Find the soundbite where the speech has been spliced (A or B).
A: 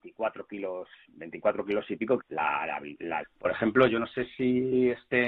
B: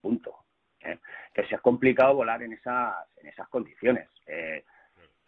A